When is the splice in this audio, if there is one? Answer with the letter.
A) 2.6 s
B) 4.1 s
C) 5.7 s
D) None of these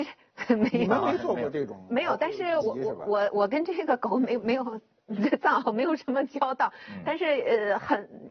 A